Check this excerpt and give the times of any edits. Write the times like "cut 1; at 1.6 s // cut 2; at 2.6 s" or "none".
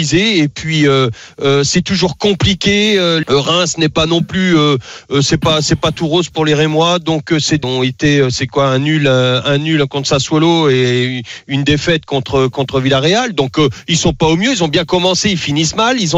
cut 1; at 3.2 s // cut 2; at 7.6 s